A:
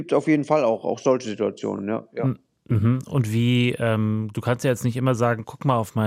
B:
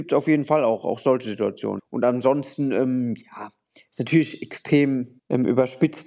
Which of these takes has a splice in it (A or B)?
B